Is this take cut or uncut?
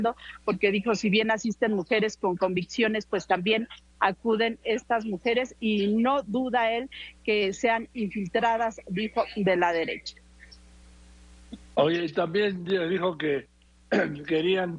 uncut